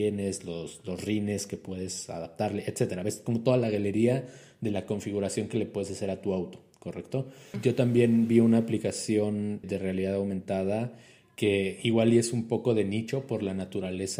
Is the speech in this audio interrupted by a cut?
yes; 2 cuts; at 7.5 s, 9.6 s

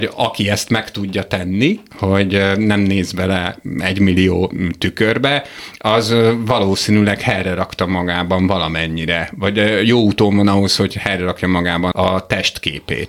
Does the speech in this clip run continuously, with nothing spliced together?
no; 1 cut; at 11.9 s

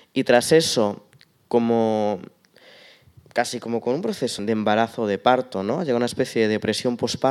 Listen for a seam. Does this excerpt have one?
yes; 1 cut; at 4.4 s

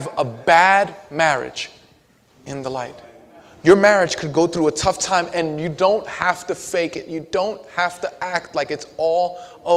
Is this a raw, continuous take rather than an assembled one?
yes; 0 cuts

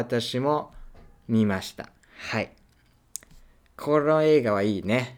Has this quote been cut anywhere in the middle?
no; 0 cuts

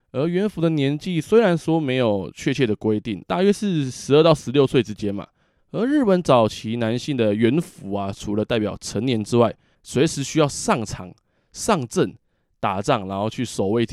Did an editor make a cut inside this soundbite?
yes; 3 cuts; at 3.2 s, 5.6 s, 9.7 s

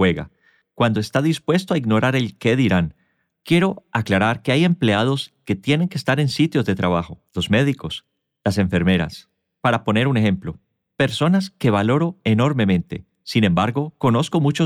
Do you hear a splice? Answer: yes; 1 cut; at 7.3 s

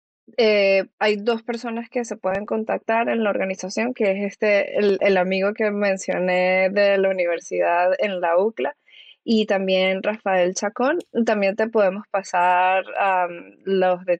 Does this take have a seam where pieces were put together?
yes; 2 cuts; at 0.9 s, 3.9 s

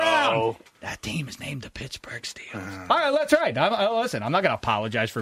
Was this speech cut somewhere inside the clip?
no; 0 cuts

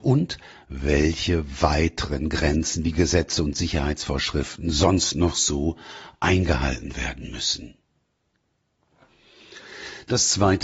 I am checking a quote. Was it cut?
no; 0 cuts

